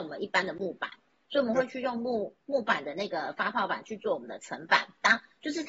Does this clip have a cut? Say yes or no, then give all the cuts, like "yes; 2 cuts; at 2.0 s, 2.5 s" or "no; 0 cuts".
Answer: no; 0 cuts